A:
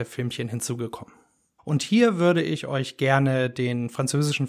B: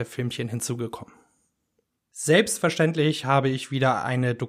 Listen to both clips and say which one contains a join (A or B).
A